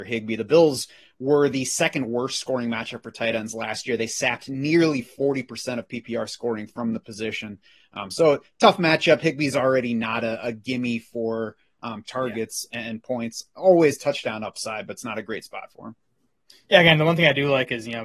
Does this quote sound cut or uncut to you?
uncut